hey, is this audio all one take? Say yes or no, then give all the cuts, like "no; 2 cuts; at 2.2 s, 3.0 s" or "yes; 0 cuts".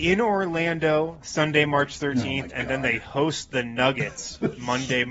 yes; 0 cuts